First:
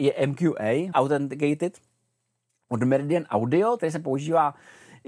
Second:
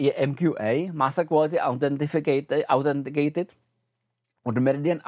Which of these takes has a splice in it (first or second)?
first